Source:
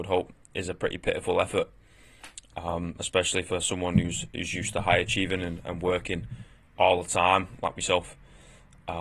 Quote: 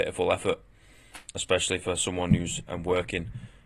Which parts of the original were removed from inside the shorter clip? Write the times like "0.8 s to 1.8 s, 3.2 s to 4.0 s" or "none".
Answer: 2.4 s to 3.0 s, 4.3 s to 5.6 s